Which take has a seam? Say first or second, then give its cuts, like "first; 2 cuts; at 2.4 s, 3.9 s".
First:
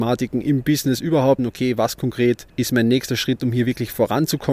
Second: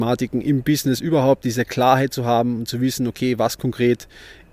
first; 2 cuts; at 1.4 s, 2.5 s